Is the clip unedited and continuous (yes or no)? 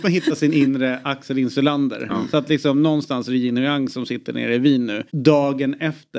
no